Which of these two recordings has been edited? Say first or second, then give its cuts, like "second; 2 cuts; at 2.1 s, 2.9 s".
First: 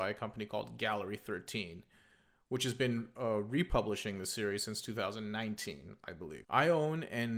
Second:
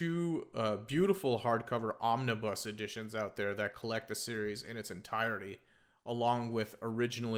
first; 1 cut; at 6.4 s